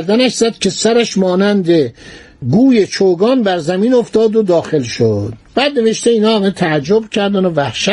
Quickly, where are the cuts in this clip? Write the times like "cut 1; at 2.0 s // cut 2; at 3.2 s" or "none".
cut 1; at 5.5 s